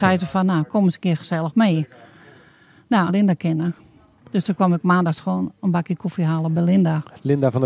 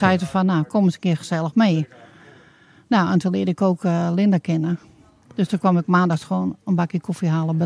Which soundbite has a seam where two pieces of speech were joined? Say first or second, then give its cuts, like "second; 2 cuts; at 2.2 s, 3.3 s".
first; 1 cut; at 3.1 s